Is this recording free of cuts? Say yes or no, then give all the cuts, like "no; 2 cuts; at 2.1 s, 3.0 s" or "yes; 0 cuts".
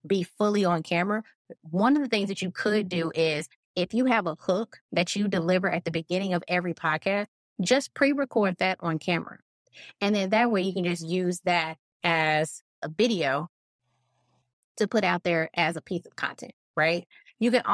yes; 0 cuts